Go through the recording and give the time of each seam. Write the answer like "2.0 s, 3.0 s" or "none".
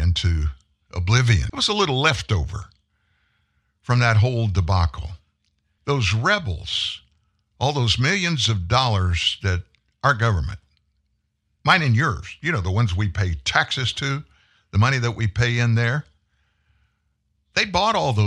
1.5 s, 5.8 s

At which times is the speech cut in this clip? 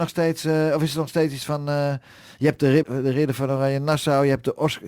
2.8 s

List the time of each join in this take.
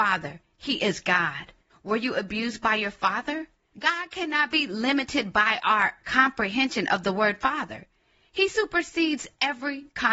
1.7 s, 3.7 s

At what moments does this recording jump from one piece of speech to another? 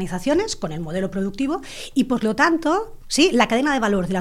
3.0 s

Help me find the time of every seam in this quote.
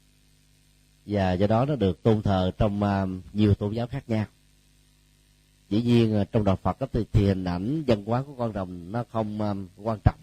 none

